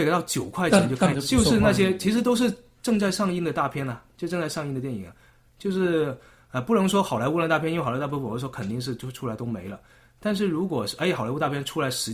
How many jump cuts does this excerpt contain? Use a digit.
1